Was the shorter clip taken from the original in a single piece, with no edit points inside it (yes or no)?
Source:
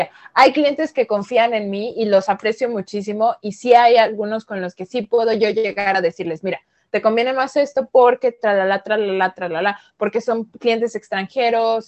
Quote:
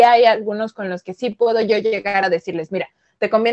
yes